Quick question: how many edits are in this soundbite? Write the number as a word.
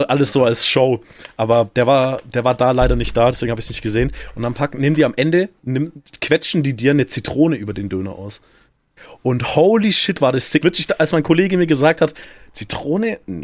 one